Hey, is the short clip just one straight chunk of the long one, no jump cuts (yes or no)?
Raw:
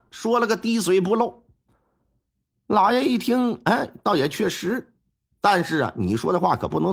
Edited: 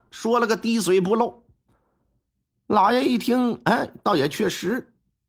yes